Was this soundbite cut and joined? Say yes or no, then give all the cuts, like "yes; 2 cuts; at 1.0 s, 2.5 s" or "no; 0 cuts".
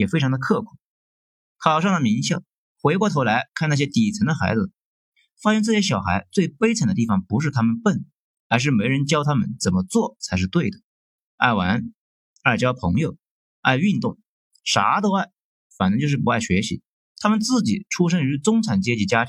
yes; 2 cuts; at 11.2 s, 17.1 s